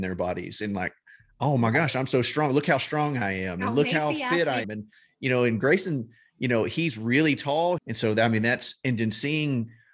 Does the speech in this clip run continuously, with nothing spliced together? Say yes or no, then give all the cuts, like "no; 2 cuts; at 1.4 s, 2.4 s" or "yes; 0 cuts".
no; 2 cuts; at 4.6 s, 7.8 s